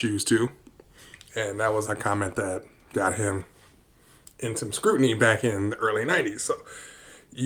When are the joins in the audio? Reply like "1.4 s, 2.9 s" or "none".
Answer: 1.8 s